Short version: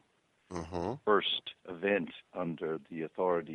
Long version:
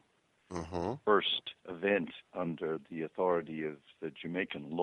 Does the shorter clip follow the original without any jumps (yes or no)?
yes